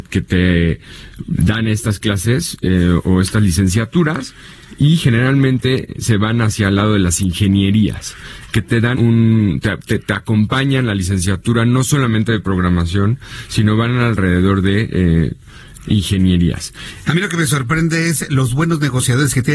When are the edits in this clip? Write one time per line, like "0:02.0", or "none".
0:08.9
0:17.1